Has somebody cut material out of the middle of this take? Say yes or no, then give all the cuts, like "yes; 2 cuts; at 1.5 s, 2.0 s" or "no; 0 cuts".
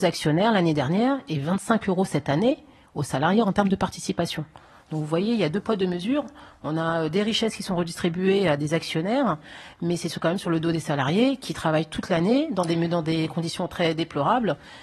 no; 0 cuts